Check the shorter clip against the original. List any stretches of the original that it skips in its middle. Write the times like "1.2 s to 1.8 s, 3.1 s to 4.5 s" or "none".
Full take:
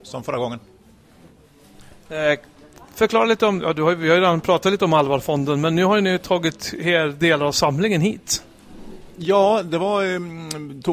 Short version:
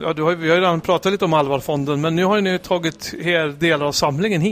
none